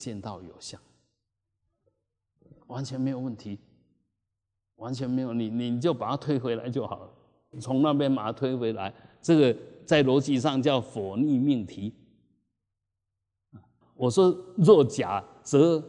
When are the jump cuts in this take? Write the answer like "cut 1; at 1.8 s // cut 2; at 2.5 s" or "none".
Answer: cut 1; at 7.5 s // cut 2; at 13.8 s